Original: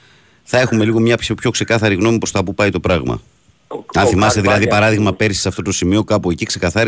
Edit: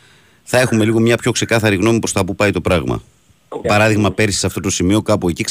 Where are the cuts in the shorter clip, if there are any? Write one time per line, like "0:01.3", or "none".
0:01.2
0:03.6